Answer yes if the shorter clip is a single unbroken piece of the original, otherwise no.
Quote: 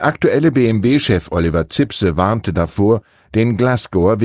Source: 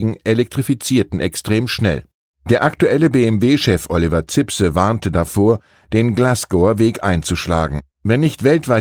yes